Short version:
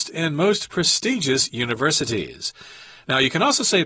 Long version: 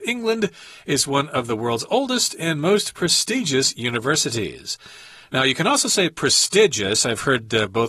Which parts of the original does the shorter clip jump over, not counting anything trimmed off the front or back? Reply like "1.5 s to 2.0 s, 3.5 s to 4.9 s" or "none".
none

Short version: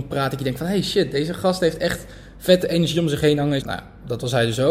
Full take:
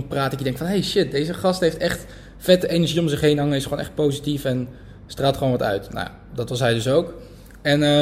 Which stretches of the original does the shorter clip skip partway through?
3.6 s to 5.9 s

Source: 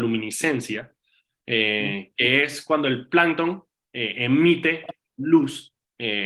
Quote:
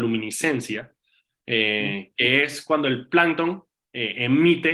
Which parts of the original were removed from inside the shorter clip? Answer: none

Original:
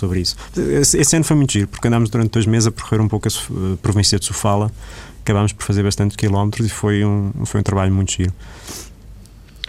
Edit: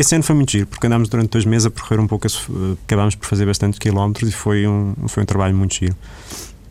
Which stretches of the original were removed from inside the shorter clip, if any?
3.8 s to 5.1 s

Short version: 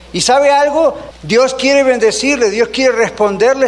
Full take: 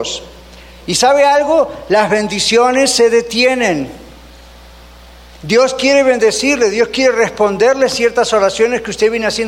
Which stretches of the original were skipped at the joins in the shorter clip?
1.8 s to 5.3 s

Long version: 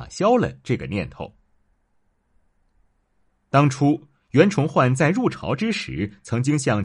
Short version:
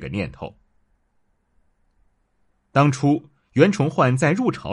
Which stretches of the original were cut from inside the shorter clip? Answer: none

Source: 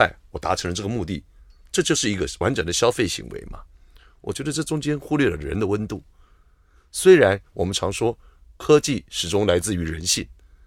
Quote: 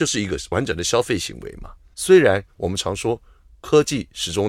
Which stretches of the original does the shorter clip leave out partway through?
3.8 s to 6.9 s

